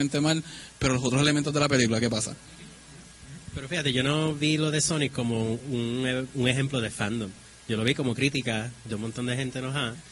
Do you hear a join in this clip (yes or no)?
no